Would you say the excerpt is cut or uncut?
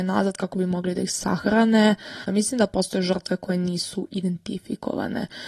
cut